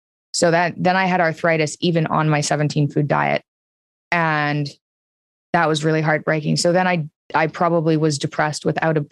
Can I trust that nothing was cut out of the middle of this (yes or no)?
yes